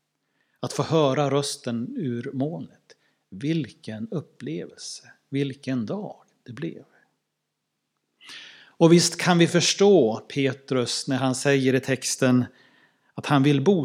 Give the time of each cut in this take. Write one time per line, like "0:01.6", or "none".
none